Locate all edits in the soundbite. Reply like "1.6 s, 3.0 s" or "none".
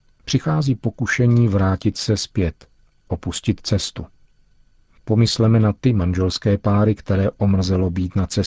none